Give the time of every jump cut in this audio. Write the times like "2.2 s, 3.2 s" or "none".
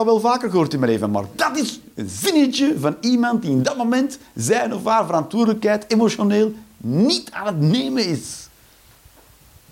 none